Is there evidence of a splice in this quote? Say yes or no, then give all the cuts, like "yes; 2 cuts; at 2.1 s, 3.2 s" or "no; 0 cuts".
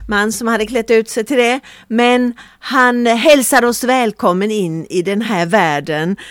no; 0 cuts